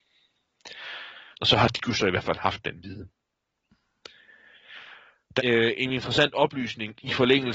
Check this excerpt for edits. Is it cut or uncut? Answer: cut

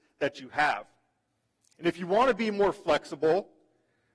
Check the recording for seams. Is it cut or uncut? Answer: uncut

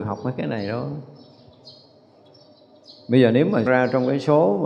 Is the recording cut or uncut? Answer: cut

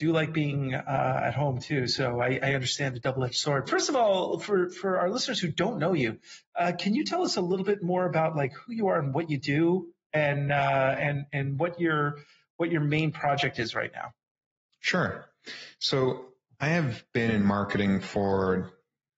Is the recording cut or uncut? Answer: cut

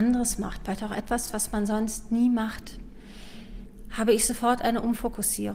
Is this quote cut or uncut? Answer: uncut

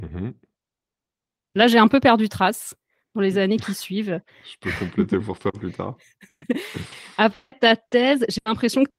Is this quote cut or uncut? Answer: uncut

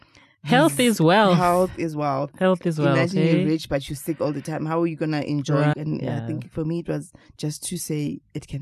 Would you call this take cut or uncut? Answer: cut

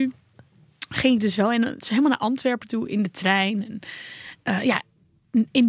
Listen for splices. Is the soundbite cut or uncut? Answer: uncut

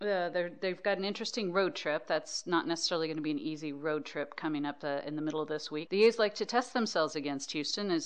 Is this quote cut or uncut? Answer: cut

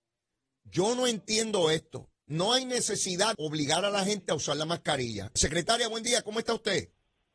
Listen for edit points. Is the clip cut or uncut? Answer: cut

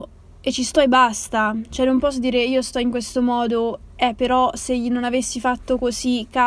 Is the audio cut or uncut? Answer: uncut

